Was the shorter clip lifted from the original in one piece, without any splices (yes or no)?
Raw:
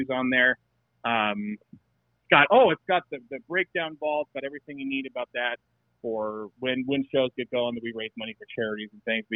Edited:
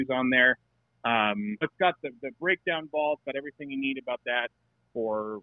no